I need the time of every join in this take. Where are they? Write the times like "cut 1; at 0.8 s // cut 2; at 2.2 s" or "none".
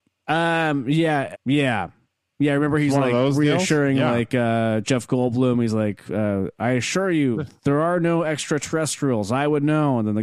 cut 1; at 1.3 s